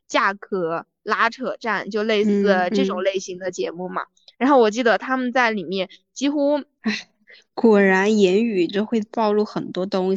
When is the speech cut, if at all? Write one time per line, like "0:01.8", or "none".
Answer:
0:06.8